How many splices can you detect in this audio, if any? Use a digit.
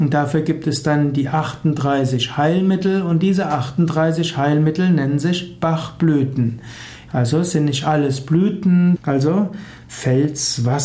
2